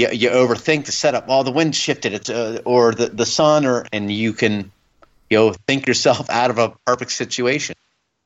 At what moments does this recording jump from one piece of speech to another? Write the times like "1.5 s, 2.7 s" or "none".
none